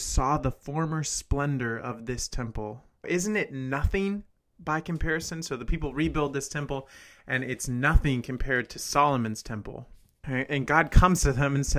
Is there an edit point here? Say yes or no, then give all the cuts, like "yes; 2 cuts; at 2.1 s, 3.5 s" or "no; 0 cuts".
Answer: yes; 2 cuts; at 3.0 s, 10.2 s